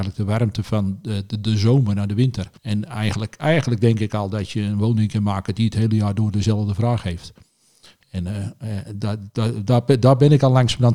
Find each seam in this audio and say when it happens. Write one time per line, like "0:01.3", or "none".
0:02.6